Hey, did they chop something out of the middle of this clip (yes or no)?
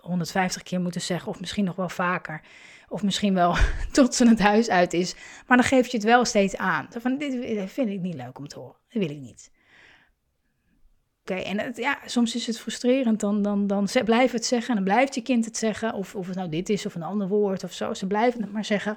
yes